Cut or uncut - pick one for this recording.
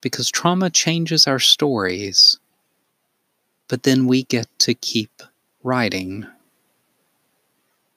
uncut